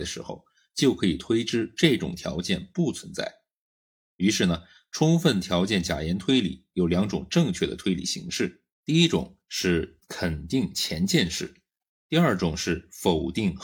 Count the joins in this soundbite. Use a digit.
2